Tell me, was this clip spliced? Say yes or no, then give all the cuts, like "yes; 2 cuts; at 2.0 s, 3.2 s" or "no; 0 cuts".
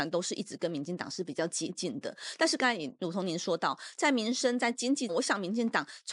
yes; 1 cut; at 5.1 s